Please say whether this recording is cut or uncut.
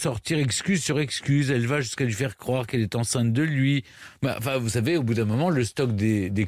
uncut